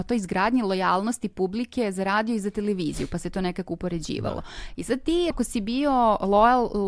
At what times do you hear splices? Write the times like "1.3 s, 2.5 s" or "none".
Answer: 5.3 s